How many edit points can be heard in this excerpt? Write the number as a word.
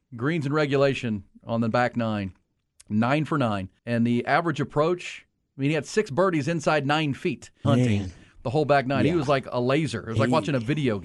two